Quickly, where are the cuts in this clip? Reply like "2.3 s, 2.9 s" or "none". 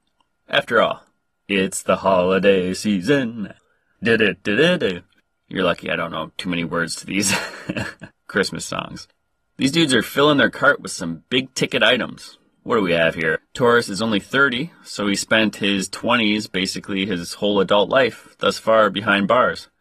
13.4 s